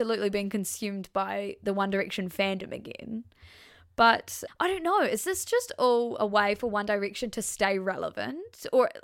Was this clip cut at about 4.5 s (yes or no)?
yes